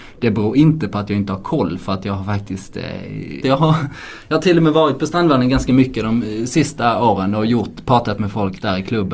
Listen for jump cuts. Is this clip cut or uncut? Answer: cut